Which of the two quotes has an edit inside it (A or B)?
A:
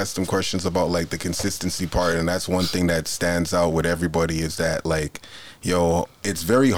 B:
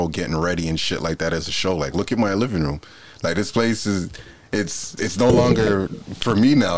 B